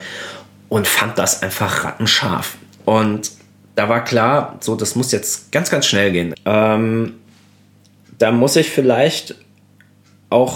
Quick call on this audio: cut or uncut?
cut